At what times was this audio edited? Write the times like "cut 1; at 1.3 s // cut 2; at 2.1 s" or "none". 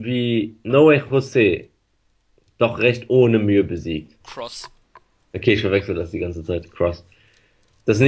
cut 1; at 4.2 s